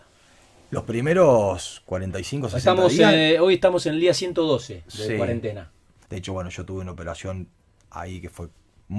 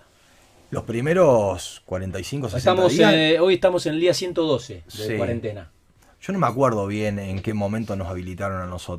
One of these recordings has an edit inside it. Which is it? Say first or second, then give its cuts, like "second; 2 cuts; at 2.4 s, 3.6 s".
first; 1 cut; at 6.1 s